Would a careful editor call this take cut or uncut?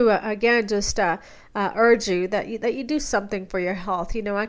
uncut